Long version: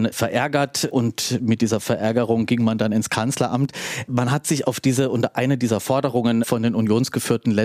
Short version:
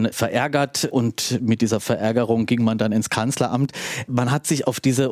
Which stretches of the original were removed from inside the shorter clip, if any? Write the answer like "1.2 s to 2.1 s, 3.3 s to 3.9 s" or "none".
none